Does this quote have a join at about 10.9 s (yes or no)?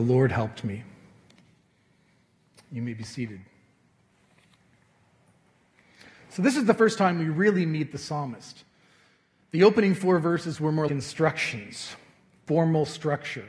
yes